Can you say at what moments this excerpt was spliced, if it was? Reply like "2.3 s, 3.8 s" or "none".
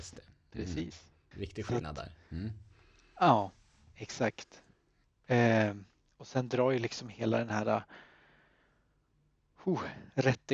1.3 s